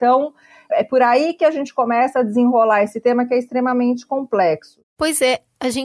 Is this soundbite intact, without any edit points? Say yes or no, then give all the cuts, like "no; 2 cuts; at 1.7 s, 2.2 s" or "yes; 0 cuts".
yes; 0 cuts